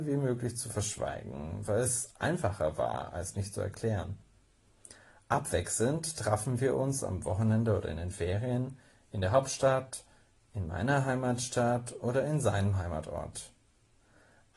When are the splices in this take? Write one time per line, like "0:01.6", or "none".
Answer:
none

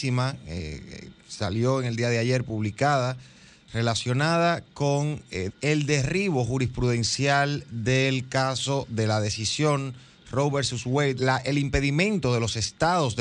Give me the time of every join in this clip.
0:05.5
0:11.2

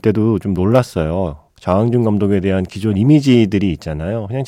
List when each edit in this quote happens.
none

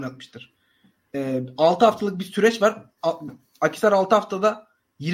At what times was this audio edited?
none

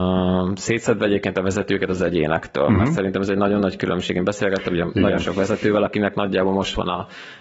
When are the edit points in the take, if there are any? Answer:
none

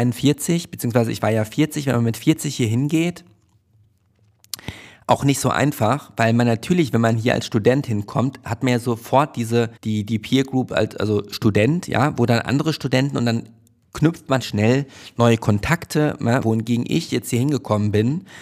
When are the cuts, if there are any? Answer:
0:09.8
0:14.4
0:16.4

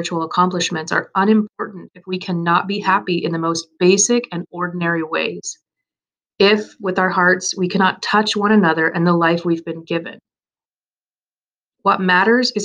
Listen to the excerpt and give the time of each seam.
none

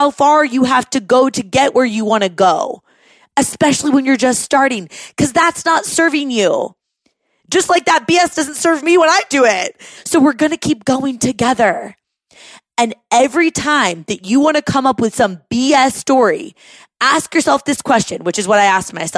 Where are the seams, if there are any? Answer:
0:09.9

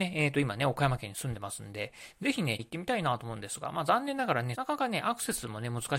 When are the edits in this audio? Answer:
0:02.6
0:04.5

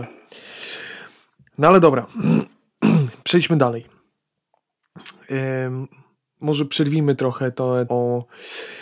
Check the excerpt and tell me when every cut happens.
0:07.9

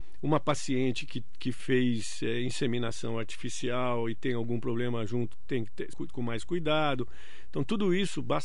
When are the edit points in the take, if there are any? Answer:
0:05.9

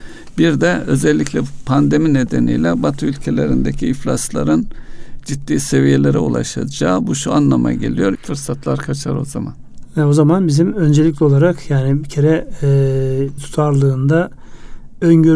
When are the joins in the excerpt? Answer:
0:08.1
0:13.4

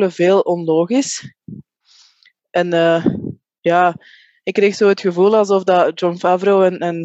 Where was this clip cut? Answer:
none

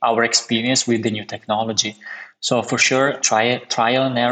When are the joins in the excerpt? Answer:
0:03.2

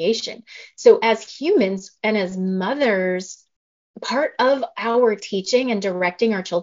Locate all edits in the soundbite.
none

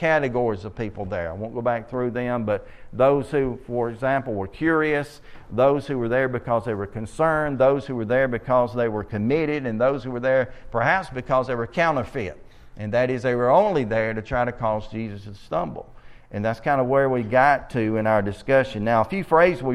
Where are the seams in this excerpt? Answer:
none

